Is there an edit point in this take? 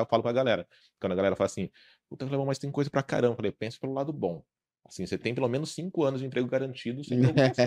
no; 0 cuts

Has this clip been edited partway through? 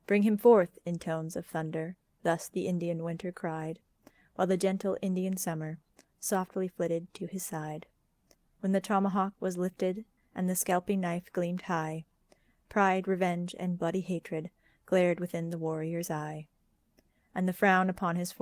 no; 0 cuts

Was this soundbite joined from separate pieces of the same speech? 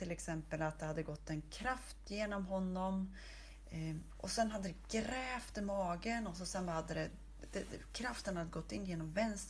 yes; 1 cut; at 4.1 s

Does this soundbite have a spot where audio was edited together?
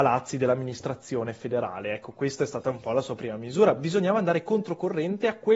no; 0 cuts

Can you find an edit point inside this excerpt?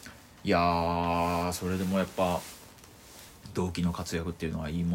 no; 0 cuts

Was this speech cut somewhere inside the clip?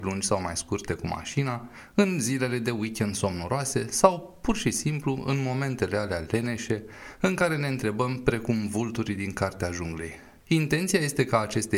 yes; 1 cut; at 10.4 s

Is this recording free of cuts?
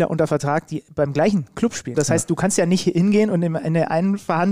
no; 1 cut; at 1.9 s

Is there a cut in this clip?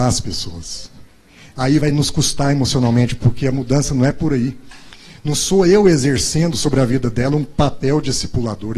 no; 0 cuts

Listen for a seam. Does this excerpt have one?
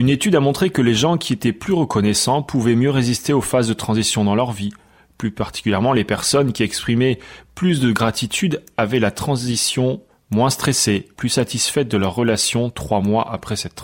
yes; 1 cut; at 11.1 s

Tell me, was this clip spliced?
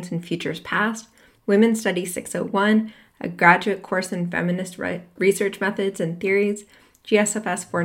yes; 1 cut; at 1.4 s

